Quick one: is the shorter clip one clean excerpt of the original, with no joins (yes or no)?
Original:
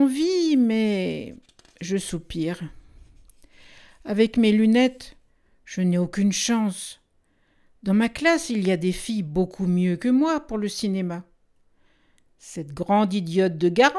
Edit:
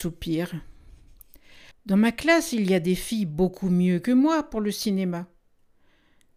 no